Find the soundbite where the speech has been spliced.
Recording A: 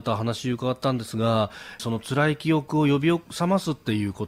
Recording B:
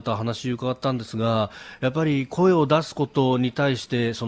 A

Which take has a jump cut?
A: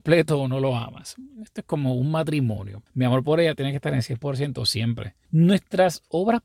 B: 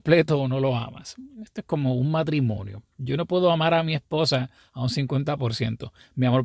A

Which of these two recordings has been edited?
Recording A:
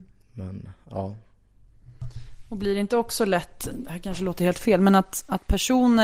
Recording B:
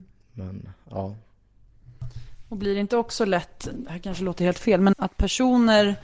B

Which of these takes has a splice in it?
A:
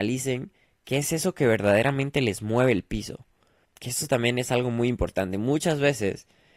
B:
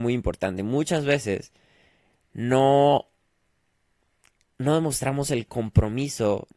A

